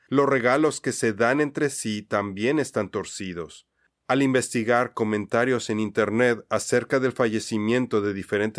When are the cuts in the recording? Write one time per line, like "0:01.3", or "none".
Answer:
0:03.9